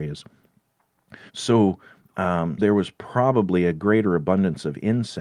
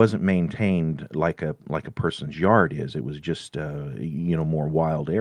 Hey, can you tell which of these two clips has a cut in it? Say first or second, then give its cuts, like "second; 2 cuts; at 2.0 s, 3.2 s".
first; 2 cuts; at 1.3 s, 2.6 s